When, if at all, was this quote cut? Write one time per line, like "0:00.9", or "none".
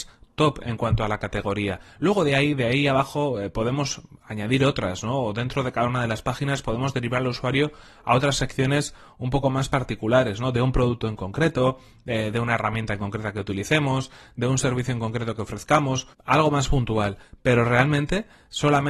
0:16.1